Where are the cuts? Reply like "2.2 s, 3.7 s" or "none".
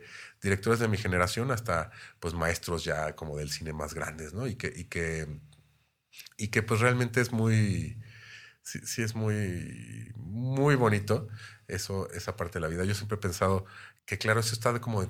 14.0 s